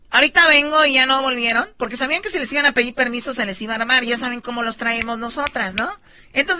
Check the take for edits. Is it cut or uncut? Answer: uncut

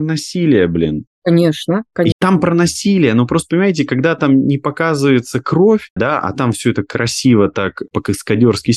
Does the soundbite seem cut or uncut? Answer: cut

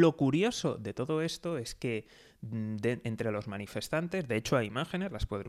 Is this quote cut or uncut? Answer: uncut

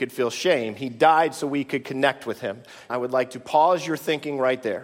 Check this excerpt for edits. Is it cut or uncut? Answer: cut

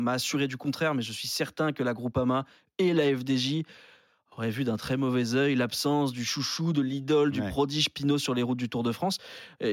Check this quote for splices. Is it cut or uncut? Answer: uncut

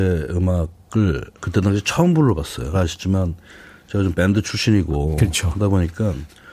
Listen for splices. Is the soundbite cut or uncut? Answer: cut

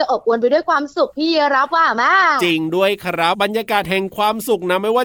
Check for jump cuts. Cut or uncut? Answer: cut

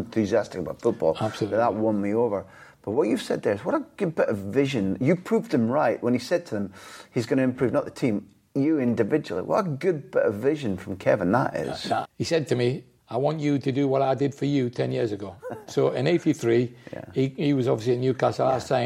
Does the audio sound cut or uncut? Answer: cut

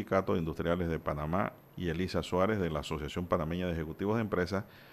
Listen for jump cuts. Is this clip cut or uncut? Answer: cut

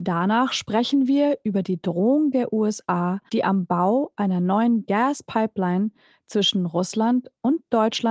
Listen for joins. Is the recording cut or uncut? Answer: cut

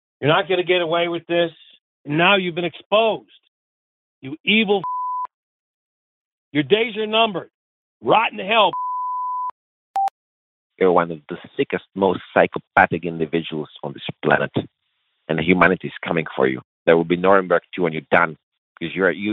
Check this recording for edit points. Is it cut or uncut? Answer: uncut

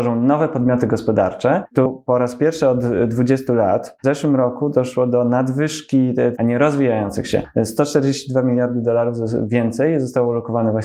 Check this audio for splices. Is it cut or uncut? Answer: cut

